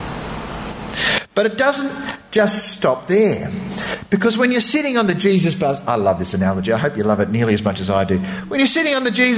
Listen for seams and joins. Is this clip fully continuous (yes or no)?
yes